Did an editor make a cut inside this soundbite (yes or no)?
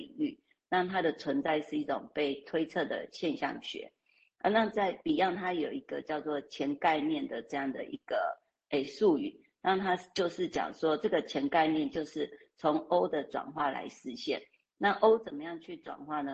no